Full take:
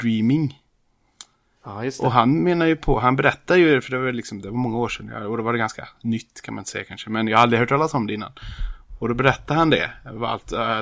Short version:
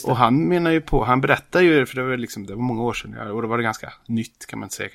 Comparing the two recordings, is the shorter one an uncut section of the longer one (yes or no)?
yes